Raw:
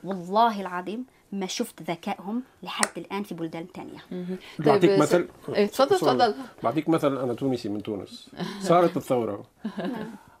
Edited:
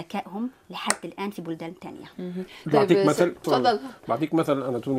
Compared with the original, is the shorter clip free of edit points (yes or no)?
no